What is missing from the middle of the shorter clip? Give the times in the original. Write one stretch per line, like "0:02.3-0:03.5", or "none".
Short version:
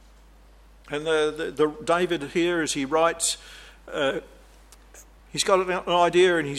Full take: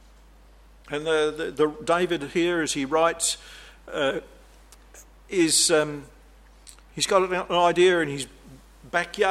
0:05.2-0:06.8